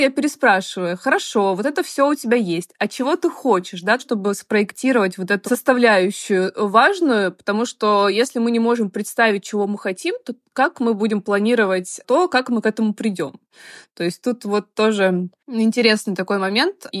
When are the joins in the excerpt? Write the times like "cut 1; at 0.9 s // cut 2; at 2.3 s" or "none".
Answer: cut 1; at 4.0 s // cut 2; at 5.4 s